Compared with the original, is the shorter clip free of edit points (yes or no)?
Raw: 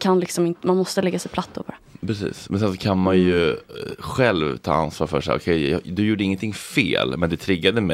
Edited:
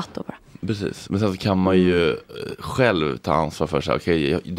yes